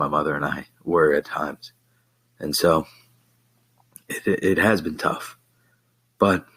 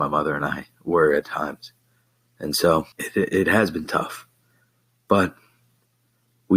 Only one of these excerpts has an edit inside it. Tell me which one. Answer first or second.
second